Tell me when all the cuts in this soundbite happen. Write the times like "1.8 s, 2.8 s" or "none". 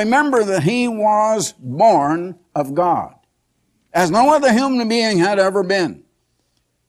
none